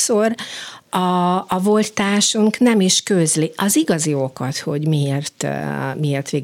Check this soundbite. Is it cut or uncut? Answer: uncut